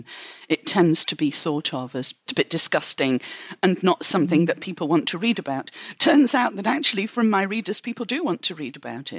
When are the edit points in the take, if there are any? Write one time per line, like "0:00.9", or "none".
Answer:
0:02.3